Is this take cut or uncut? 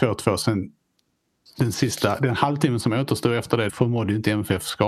cut